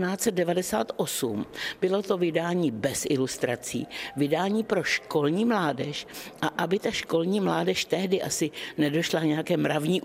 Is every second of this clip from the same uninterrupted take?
yes; 0 cuts

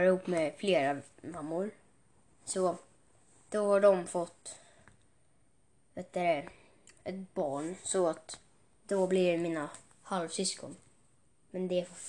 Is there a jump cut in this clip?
no; 0 cuts

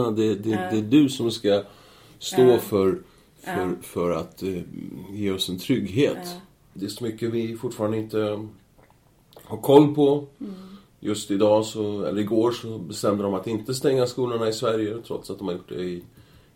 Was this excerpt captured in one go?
no; 1 cut; at 6.7 s

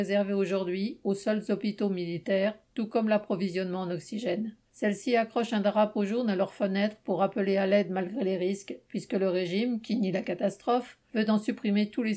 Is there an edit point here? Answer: yes; 1 cut; at 4.6 s

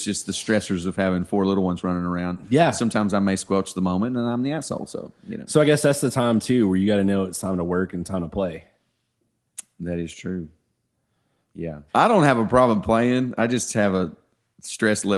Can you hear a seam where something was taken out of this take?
yes; 1 cut; at 11.9 s

